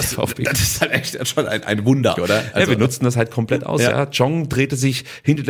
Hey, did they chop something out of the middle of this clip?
yes; 1 cut; at 2.1 s

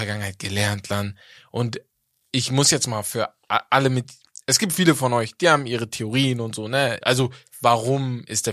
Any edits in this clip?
yes; 1 cut; at 7.0 s

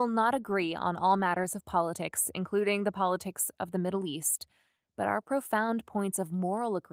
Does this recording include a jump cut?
no; 0 cuts

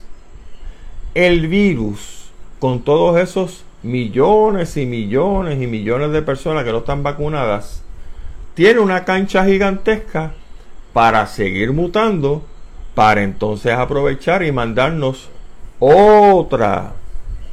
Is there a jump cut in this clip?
no; 0 cuts

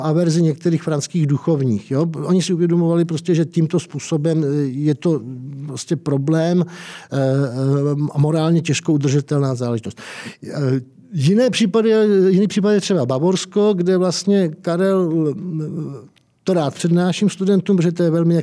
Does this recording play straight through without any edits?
yes; 0 cuts

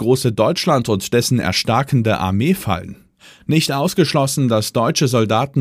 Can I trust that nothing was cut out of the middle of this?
yes; 0 cuts

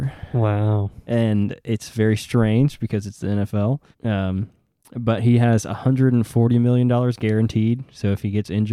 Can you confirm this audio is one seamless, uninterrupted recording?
no; 1 cut; at 3.9 s

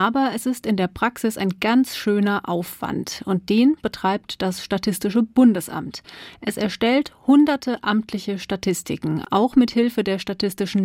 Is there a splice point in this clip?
no; 0 cuts

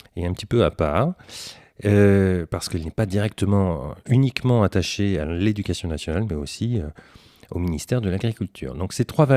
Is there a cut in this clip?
no; 0 cuts

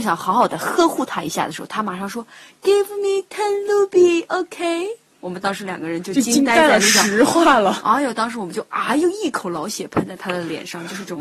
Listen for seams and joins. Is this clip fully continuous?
yes; 0 cuts

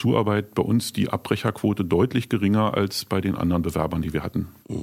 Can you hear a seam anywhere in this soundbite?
no; 0 cuts

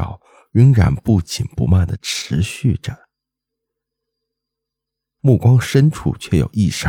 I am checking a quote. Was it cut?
yes; 1 cut; at 5.2 s

